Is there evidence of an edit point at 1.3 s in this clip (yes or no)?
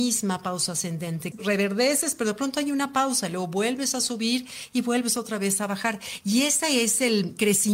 yes